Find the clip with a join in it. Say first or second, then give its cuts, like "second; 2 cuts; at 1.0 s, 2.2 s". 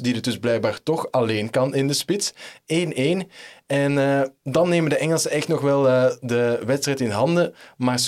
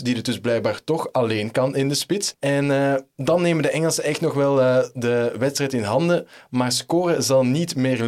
second; 1 cut; at 2.3 s